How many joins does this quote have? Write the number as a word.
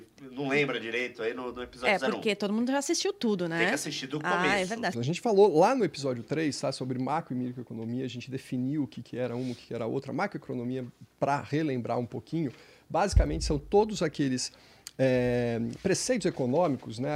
one